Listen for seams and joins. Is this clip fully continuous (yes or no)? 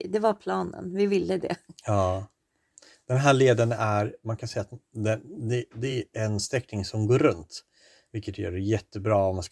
yes